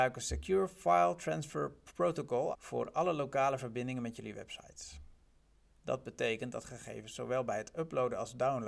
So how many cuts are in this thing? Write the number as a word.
one